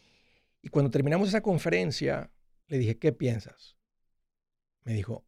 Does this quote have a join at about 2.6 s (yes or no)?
yes